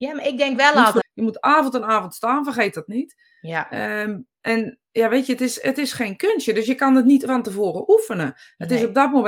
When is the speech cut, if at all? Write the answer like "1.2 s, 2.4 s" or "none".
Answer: 1.0 s